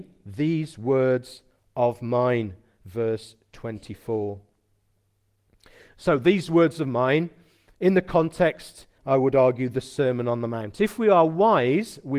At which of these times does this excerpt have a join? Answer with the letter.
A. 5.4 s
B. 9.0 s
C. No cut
B